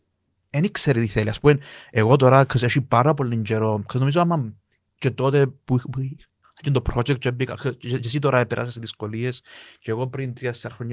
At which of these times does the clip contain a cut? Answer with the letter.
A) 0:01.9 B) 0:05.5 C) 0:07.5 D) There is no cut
D